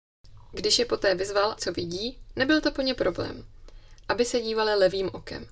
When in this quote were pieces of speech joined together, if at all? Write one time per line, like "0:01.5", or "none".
0:01.6
0:04.0